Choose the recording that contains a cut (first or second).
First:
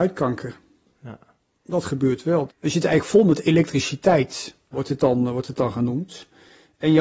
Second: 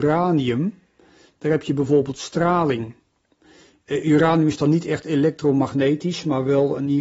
first